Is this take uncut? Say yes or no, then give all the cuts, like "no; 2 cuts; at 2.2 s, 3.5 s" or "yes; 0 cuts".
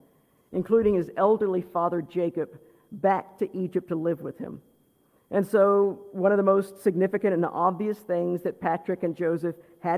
no; 1 cut; at 5.2 s